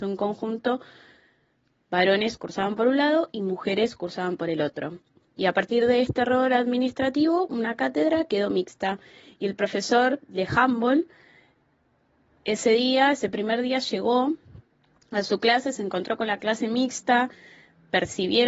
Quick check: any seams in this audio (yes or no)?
no